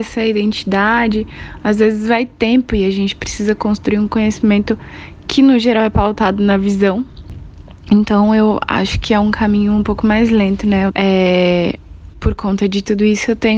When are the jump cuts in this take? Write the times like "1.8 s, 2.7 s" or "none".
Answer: 10.9 s, 12.1 s